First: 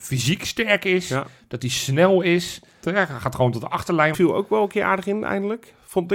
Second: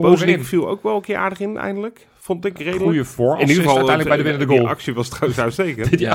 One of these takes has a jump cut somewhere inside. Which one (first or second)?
first